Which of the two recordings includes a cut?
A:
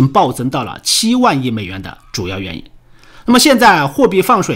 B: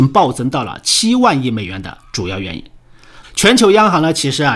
B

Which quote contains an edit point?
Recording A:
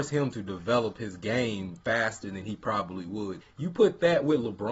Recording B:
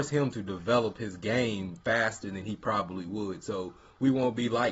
A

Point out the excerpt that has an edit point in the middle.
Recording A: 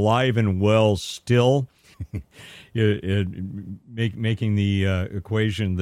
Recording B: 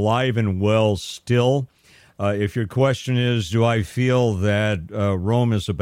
A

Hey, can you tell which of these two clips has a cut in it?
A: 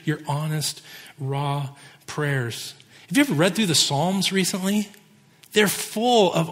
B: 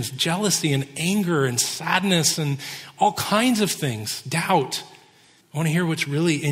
B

